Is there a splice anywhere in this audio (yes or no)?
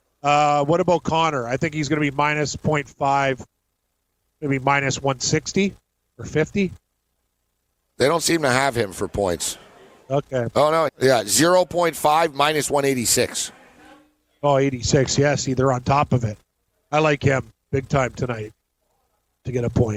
yes